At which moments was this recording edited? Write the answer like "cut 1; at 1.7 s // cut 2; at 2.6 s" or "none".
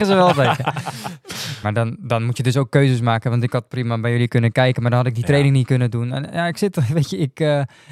cut 1; at 1.6 s